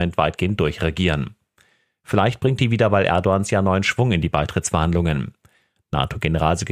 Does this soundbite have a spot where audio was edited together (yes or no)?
no